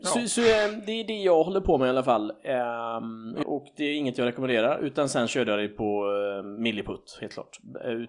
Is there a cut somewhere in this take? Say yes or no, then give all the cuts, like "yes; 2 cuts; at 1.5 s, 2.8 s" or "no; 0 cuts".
yes; 1 cut; at 3.4 s